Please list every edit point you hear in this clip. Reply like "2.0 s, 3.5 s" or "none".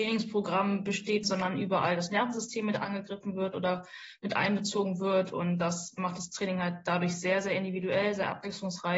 1.2 s

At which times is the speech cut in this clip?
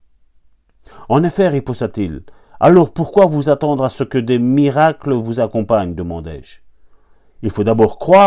none

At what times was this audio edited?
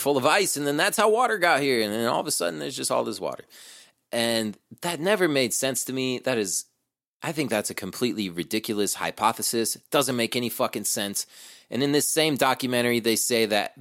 none

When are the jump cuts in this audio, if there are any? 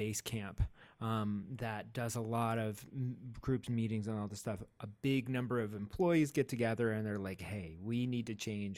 none

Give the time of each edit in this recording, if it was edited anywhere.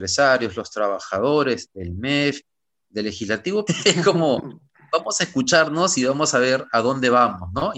3.7 s

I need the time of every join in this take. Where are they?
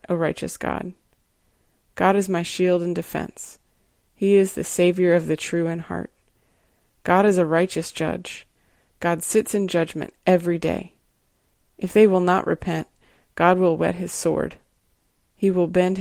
none

